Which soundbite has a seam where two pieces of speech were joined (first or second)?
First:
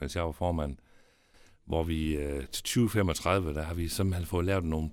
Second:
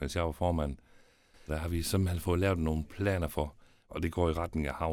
second